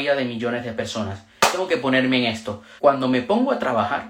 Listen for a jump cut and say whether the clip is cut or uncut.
cut